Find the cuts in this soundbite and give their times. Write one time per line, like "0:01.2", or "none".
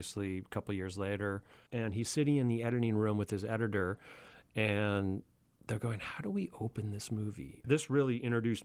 0:01.7
0:07.6